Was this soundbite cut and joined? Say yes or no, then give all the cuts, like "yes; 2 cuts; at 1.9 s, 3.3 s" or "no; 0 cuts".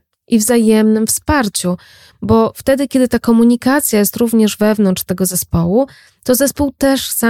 no; 0 cuts